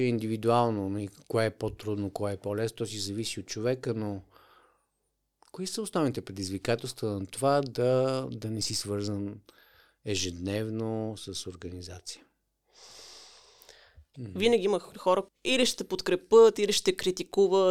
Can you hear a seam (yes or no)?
yes